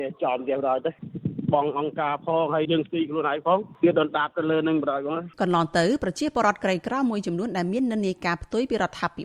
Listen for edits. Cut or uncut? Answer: cut